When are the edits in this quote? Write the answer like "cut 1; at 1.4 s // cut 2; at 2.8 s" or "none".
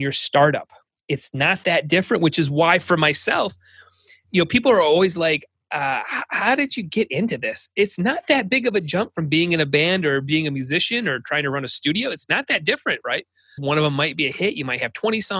cut 1; at 13.6 s